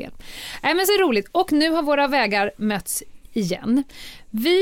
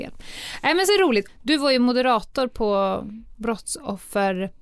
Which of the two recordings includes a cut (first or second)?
second